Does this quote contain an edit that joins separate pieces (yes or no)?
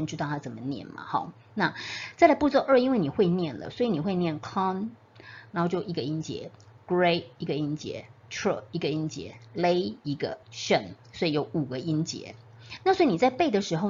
yes